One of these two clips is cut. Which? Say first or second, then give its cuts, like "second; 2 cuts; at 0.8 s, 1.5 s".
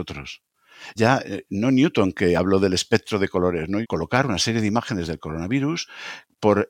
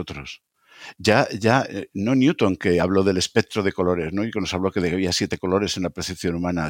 first; 2 cuts; at 1.0 s, 3.8 s